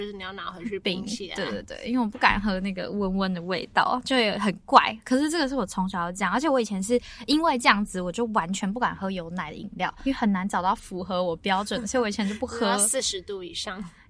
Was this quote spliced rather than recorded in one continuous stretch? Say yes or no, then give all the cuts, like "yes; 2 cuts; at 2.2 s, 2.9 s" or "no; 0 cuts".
no; 0 cuts